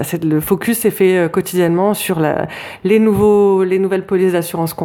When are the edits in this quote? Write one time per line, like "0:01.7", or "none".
none